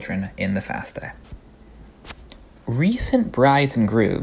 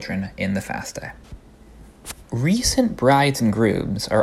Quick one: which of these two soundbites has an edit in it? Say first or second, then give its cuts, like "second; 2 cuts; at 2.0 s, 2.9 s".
second; 1 cut; at 2.2 s